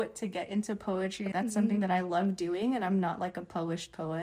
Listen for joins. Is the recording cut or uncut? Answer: uncut